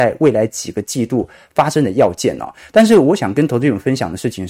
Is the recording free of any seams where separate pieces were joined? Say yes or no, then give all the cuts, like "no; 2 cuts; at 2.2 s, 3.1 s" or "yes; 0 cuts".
yes; 0 cuts